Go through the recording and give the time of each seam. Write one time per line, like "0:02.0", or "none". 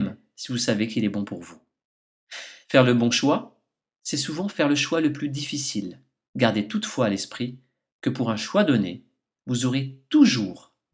0:02.6
0:06.3